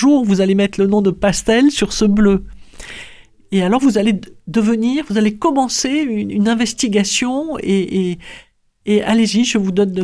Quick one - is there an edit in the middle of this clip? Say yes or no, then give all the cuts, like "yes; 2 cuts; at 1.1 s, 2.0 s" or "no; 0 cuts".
no; 0 cuts